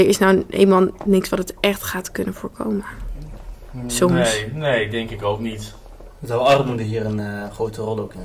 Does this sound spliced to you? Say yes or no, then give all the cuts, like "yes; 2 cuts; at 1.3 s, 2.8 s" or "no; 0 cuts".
no; 0 cuts